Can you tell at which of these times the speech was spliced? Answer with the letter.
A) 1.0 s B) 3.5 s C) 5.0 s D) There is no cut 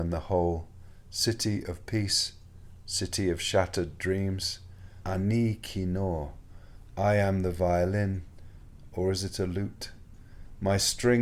C